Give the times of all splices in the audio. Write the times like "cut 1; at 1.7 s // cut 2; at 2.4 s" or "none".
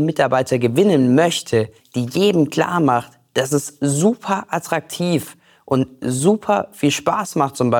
cut 1; at 1.8 s